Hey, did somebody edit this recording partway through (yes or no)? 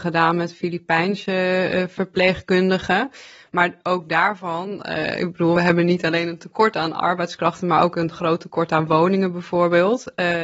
no